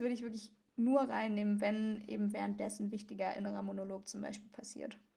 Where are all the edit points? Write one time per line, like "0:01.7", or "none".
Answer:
none